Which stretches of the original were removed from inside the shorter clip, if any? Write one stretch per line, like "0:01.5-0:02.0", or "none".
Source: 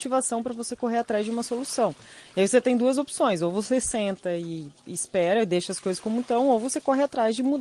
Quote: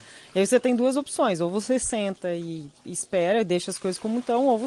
none